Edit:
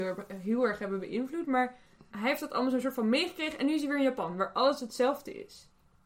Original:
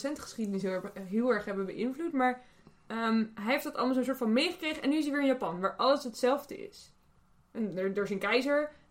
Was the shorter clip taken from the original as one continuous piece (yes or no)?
no